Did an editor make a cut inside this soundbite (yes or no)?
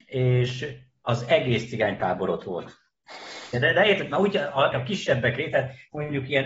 yes